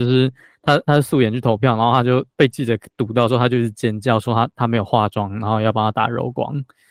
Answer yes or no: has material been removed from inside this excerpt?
no